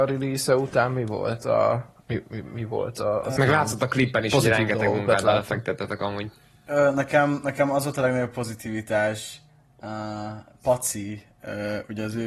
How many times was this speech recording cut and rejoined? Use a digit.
1